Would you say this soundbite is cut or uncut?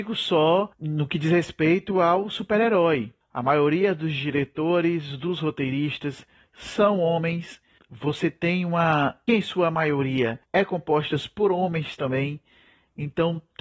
cut